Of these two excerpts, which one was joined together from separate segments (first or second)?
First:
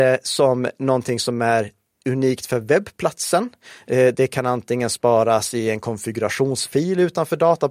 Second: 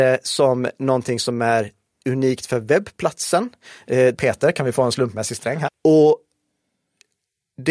second